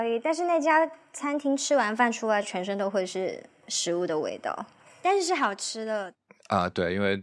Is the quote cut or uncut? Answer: uncut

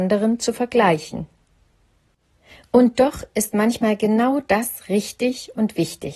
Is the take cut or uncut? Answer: uncut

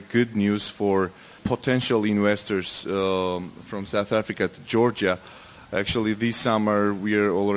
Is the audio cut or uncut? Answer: cut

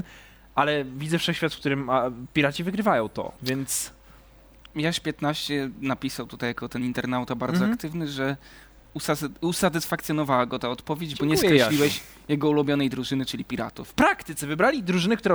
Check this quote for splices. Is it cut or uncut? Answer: cut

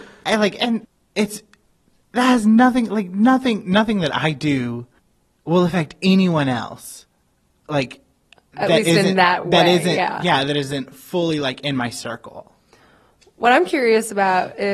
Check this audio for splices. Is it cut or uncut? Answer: uncut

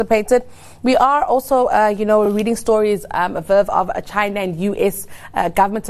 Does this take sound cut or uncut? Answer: uncut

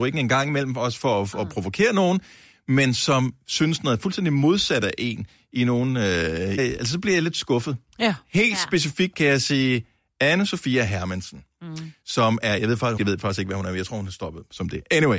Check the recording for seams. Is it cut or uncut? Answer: cut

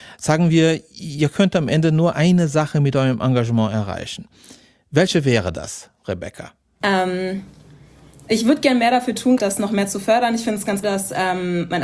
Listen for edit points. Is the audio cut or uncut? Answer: cut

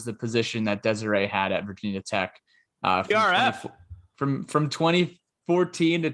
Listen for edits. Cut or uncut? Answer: uncut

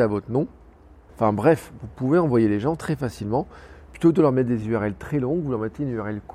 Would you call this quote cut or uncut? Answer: cut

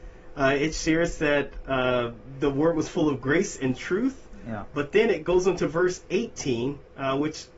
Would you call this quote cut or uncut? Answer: uncut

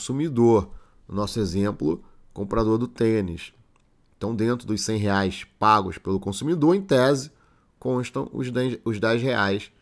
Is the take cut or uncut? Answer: uncut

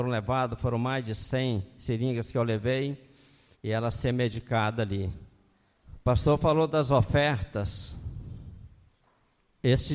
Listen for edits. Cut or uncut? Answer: cut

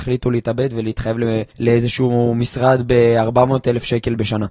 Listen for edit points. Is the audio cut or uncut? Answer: cut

